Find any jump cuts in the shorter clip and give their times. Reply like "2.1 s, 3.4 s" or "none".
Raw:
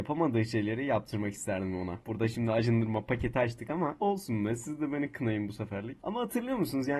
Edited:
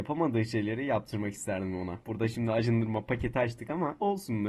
none